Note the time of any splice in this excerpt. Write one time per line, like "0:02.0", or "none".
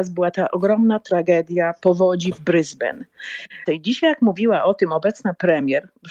0:03.7